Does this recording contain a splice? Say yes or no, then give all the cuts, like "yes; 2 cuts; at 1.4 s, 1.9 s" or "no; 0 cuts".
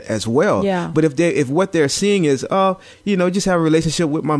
no; 0 cuts